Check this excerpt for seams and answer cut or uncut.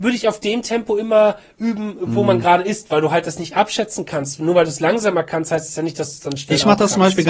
uncut